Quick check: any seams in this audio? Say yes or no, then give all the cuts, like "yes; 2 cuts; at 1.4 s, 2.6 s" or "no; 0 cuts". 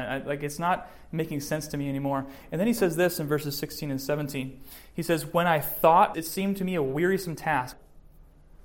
yes; 2 cuts; at 6.1 s, 7.7 s